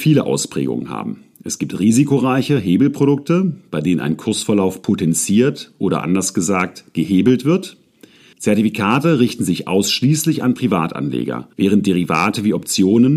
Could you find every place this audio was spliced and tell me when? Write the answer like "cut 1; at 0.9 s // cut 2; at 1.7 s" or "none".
cut 1; at 8.3 s // cut 2; at 11.5 s